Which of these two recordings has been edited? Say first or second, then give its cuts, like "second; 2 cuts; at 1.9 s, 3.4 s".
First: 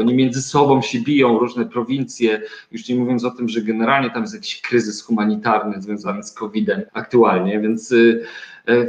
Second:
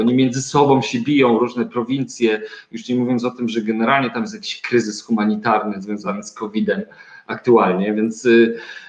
first; 1 cut; at 6.9 s